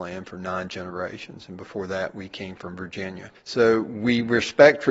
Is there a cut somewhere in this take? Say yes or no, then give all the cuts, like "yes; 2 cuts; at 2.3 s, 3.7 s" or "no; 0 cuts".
no; 0 cuts